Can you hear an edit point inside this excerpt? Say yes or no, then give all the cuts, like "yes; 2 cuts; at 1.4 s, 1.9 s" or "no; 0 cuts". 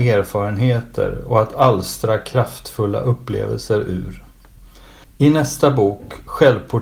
yes; 1 cut; at 5.0 s